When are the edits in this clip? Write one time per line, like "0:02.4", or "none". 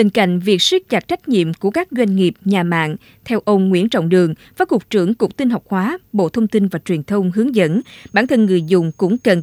none